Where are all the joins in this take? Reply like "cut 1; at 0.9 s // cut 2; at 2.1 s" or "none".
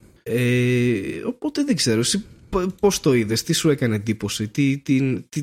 none